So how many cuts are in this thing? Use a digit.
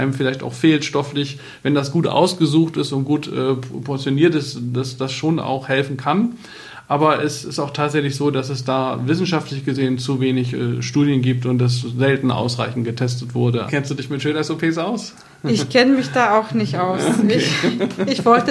1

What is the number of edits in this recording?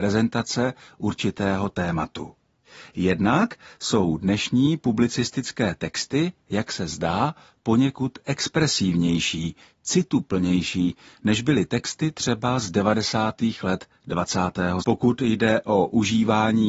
1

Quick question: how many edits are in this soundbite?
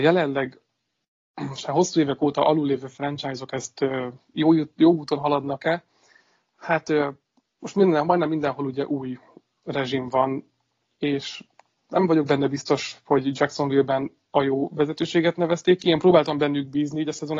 0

